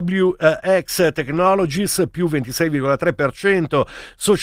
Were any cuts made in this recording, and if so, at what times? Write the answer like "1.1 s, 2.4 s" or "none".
none